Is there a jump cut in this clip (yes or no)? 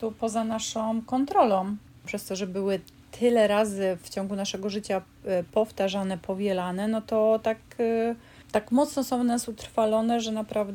no